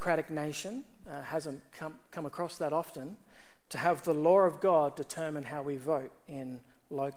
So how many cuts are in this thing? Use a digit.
1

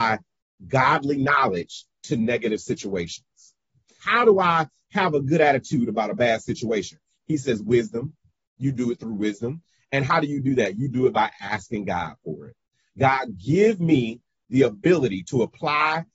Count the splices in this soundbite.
1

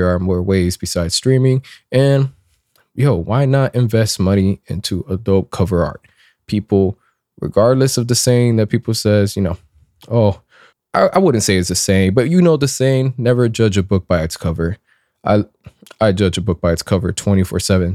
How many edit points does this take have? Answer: 1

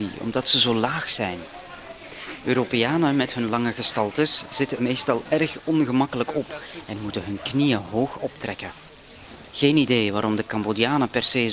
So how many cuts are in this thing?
1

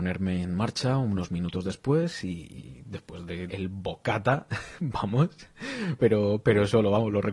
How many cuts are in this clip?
2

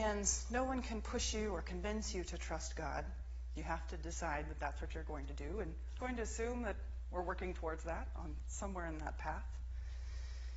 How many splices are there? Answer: 1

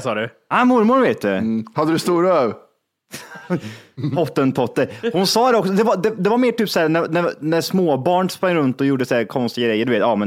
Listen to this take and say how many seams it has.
0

